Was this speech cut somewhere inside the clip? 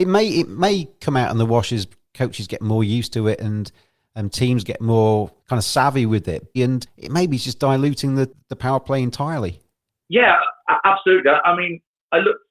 yes; 2 cuts; at 5.4 s, 6.6 s

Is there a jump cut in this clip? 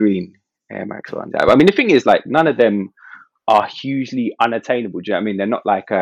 yes; 1 cut; at 1.3 s

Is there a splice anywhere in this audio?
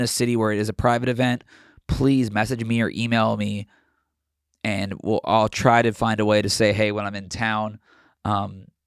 no; 0 cuts

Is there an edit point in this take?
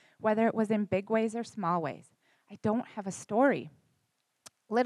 no; 0 cuts

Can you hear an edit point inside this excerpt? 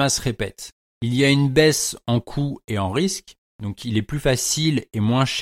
no; 0 cuts

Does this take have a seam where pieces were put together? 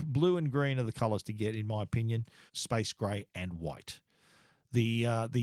yes; 1 cut; at 2.5 s

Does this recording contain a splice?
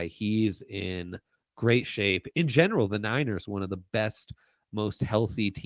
no; 0 cuts

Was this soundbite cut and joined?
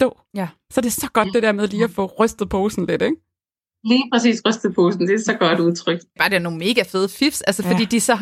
no; 0 cuts

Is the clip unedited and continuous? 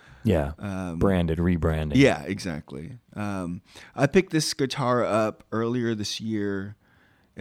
yes; 0 cuts

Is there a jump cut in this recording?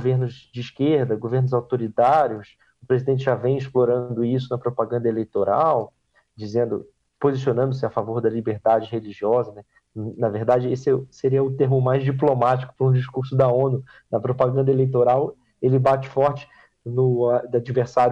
no; 0 cuts

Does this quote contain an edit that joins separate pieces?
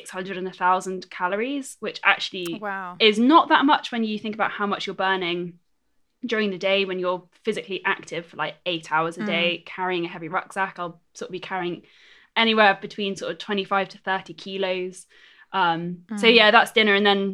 no; 0 cuts

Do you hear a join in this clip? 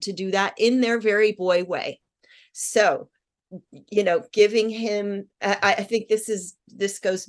no; 0 cuts

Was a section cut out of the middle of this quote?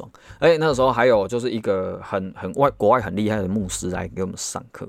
no; 0 cuts

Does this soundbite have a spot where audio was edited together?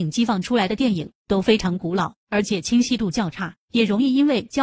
no; 0 cuts

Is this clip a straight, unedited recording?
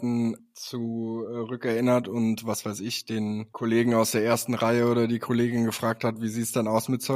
yes; 0 cuts

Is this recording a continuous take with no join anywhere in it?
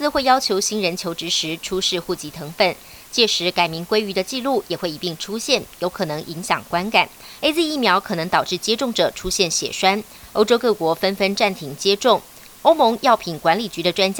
no; 1 cut; at 7.4 s

